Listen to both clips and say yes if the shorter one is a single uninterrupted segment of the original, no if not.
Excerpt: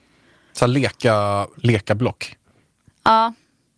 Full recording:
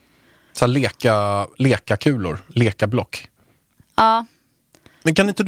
no